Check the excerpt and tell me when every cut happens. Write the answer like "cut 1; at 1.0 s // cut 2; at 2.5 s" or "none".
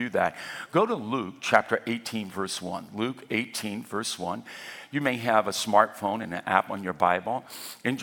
none